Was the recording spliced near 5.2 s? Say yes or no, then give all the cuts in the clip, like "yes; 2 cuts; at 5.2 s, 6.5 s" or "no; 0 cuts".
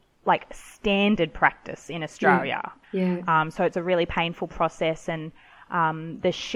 no; 1 cut; at 2.8 s